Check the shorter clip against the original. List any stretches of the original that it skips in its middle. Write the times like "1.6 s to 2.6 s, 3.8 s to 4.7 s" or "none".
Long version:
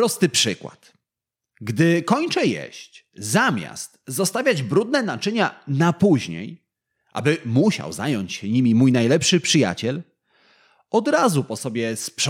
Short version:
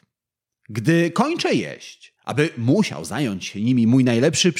3.1 s to 7.0 s